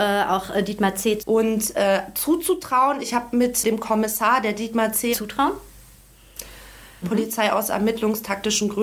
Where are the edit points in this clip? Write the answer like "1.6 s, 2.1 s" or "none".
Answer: 1.2 s, 5.1 s, 7.0 s